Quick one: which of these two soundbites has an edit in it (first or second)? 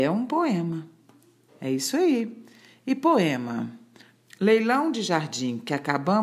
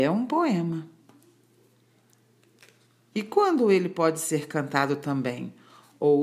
first